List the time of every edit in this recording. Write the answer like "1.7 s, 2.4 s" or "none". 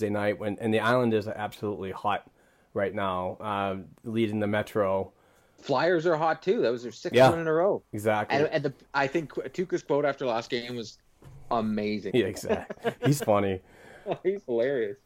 12.1 s, 13.2 s